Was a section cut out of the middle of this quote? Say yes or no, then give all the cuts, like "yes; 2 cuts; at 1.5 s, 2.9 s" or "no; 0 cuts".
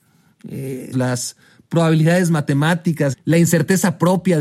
yes; 2 cuts; at 0.9 s, 3.1 s